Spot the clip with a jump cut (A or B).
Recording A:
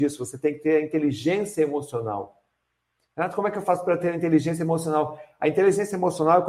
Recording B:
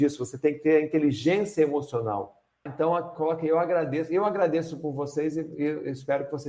B